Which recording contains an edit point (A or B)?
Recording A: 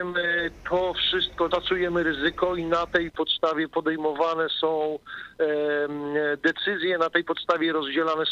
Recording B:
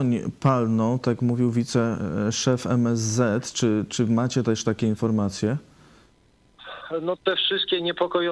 A